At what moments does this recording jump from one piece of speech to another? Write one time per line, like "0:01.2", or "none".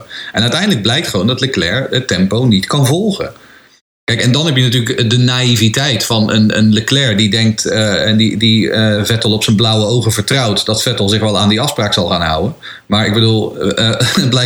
none